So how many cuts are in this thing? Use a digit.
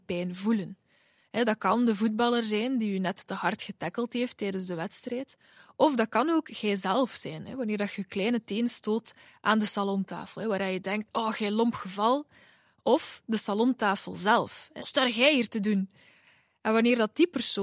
1